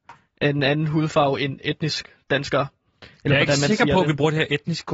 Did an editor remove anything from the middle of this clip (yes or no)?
no